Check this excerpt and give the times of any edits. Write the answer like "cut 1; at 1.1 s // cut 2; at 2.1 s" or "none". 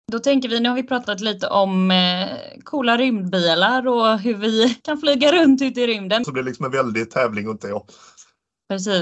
cut 1; at 4.8 s // cut 2; at 6.2 s